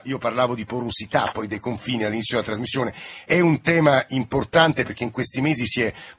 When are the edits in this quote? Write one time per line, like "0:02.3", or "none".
0:03.3